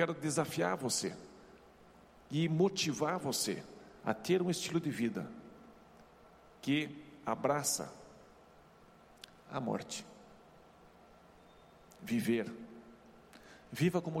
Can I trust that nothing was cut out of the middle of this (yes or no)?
yes